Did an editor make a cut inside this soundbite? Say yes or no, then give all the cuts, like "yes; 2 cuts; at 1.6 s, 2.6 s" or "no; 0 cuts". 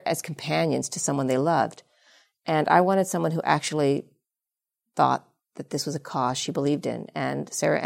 no; 0 cuts